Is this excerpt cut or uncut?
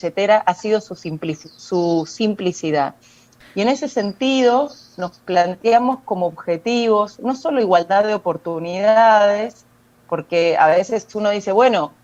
cut